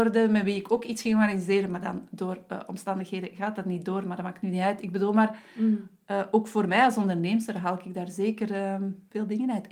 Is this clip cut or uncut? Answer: uncut